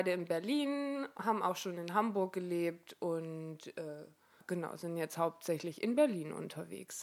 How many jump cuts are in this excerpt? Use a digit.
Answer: 1